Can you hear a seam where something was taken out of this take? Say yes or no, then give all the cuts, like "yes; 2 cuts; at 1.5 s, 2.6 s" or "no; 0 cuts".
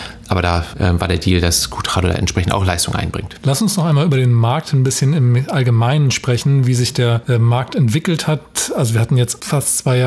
no; 0 cuts